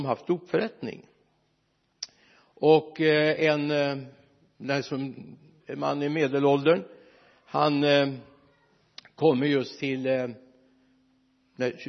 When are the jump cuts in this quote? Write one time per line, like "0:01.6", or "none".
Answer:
0:05.6